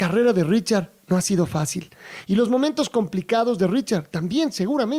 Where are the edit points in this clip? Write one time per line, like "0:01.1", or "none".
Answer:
0:02.2